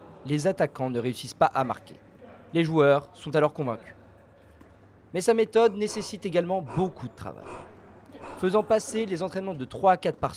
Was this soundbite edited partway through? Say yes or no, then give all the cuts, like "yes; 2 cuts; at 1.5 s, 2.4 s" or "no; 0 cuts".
no; 0 cuts